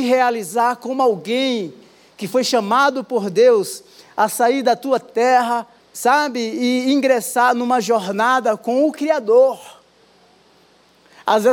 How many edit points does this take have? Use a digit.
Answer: 1